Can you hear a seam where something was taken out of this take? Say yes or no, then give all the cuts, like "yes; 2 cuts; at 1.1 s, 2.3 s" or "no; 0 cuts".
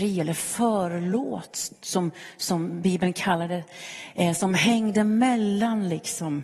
no; 0 cuts